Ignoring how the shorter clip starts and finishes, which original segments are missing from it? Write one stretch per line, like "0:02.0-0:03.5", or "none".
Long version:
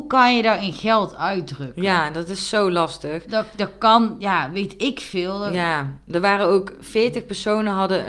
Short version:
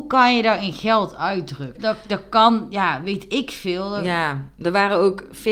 0:01.7-0:03.2